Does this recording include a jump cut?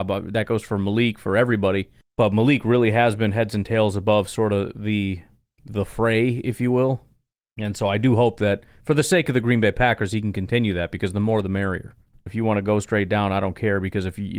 yes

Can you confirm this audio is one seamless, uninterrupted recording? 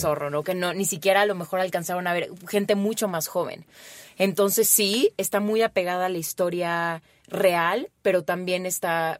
yes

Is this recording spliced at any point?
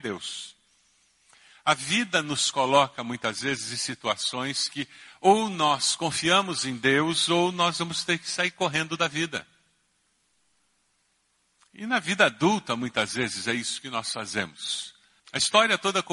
yes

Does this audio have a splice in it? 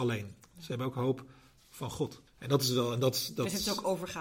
yes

